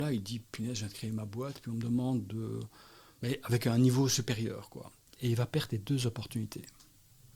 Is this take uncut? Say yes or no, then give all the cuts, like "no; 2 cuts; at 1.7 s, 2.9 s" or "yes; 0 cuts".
no; 1 cut; at 5.1 s